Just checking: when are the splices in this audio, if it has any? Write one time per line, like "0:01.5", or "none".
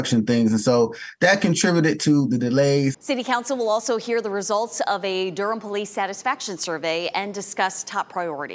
0:02.9